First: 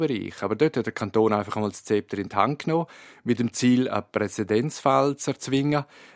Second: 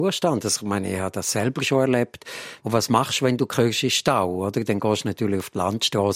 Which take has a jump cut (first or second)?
second